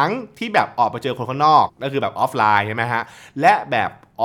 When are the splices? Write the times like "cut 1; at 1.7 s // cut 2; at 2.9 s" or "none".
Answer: cut 1; at 1.7 s